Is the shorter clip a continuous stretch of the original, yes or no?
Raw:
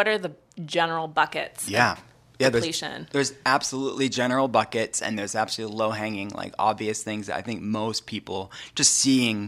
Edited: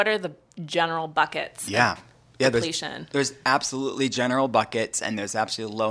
yes